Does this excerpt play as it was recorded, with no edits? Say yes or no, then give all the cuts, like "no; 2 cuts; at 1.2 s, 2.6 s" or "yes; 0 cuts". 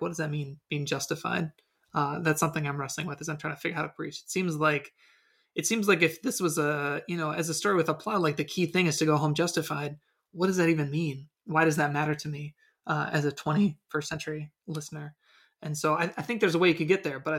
yes; 0 cuts